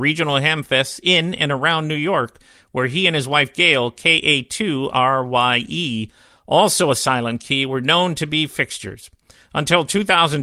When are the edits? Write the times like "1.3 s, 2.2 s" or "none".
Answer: none